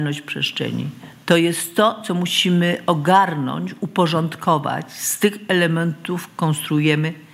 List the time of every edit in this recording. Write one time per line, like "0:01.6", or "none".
none